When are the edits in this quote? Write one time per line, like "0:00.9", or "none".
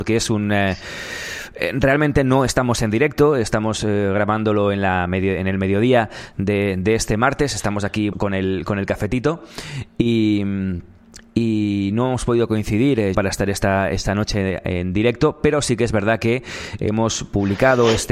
0:08.1
0:13.1